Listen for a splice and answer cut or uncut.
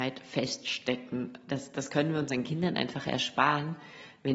uncut